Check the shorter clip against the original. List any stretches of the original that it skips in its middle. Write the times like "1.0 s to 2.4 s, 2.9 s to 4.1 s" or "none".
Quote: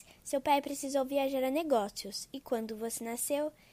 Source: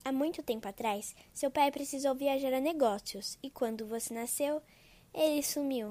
none